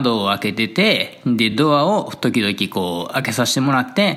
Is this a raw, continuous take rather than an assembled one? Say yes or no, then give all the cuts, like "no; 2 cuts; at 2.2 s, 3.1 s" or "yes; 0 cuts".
yes; 0 cuts